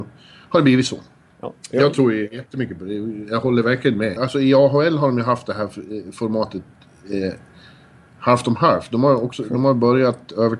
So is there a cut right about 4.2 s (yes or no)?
yes